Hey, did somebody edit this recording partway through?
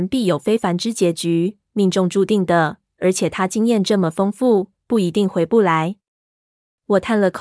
no; 0 cuts

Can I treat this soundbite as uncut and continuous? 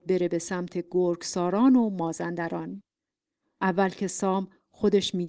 no; 1 cut; at 3.5 s

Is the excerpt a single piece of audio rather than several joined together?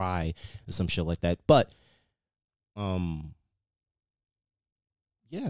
no; 1 cut; at 1.5 s

